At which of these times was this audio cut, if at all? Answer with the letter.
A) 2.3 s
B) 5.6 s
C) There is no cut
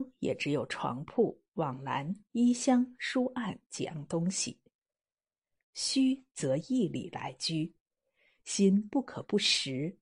B